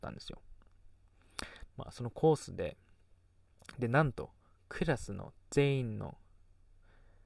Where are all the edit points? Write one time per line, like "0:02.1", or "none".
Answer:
0:01.7